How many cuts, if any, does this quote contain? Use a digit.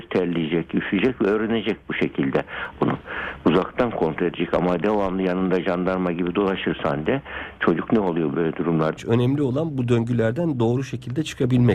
2